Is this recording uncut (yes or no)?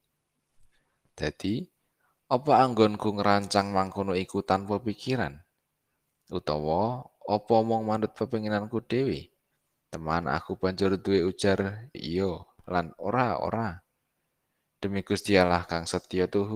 no